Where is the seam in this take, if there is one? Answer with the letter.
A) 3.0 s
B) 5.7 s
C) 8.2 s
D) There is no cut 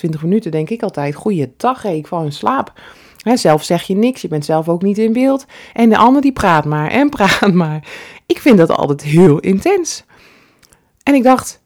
D